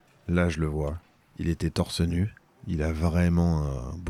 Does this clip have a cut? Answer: yes; 1 cut; at 1.2 s

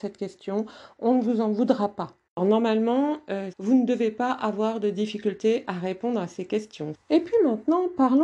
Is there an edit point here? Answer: yes; 3 cuts; at 2.3 s, 3.5 s, 6.9 s

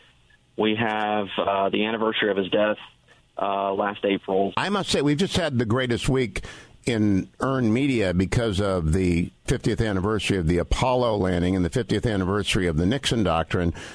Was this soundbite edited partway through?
yes; 2 cuts; at 4.5 s, 9.5 s

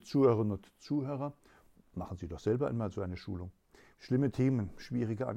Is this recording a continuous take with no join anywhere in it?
no; 1 cut; at 3.9 s

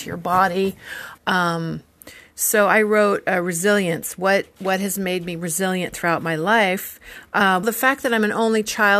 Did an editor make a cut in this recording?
yes; 2 cuts; at 1.2 s, 7.6 s

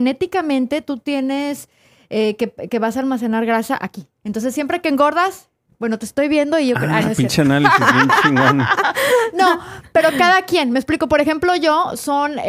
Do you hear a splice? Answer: yes; 1 cut; at 4.2 s

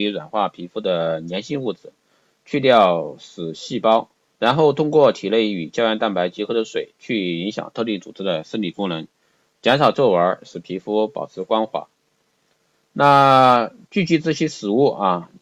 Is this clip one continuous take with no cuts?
no; 1 cut; at 4.2 s

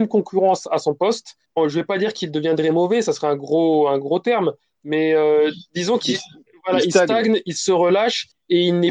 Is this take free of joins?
yes; 0 cuts

